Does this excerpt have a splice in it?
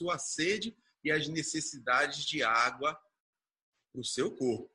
no; 0 cuts

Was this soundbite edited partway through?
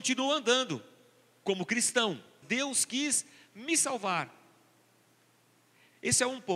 yes; 1 cut; at 2.4 s

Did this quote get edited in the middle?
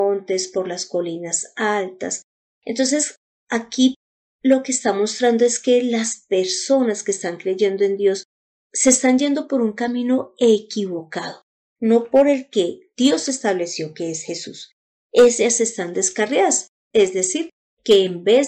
yes; 1 cut; at 8.5 s

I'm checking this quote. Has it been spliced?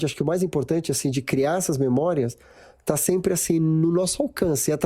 no; 0 cuts

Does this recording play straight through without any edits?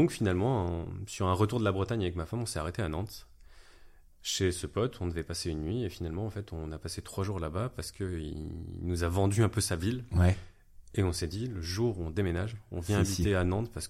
yes; 0 cuts

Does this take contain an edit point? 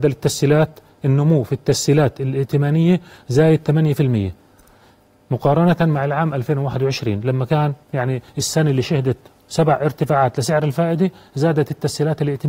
yes; 1 cut; at 7.8 s

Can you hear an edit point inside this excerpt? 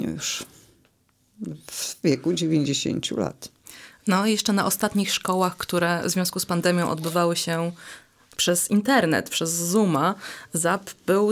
no; 0 cuts

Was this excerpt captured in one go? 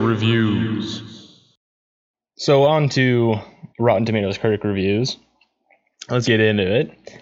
no; 2 cuts; at 3.7 s, 6.2 s

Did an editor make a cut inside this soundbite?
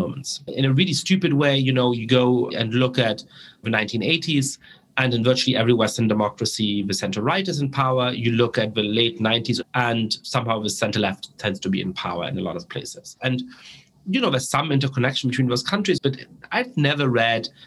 yes; 2 cuts; at 9.6 s, 16.0 s

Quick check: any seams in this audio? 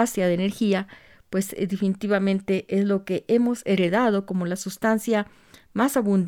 no; 0 cuts

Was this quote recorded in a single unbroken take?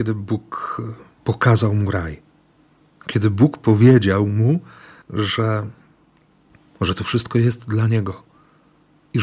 yes; 0 cuts

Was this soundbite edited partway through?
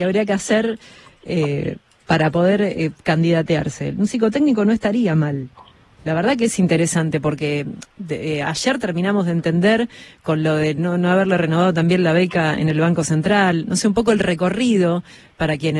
no; 0 cuts

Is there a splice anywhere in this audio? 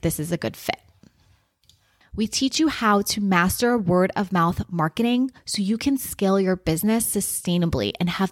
yes; 1 cut; at 2.0 s

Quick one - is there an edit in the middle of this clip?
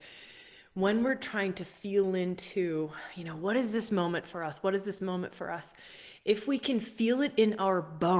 no; 0 cuts

